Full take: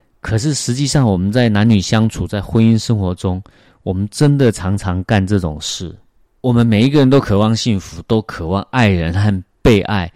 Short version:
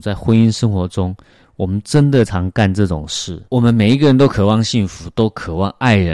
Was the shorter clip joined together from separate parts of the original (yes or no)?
yes